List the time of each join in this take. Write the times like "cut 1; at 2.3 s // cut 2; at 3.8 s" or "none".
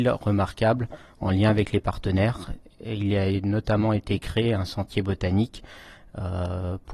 none